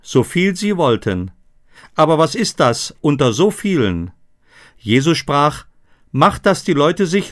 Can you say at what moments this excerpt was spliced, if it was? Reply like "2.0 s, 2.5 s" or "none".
1.8 s